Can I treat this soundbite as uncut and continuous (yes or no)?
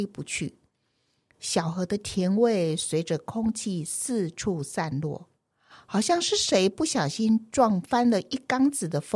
yes